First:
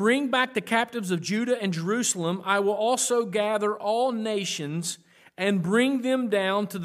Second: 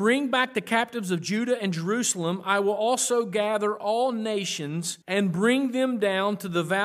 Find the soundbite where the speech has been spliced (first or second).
second